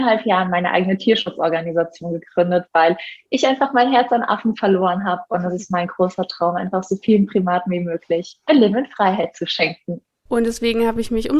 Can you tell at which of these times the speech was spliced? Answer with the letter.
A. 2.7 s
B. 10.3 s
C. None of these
B